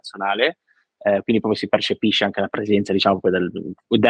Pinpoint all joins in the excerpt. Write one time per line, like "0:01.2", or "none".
none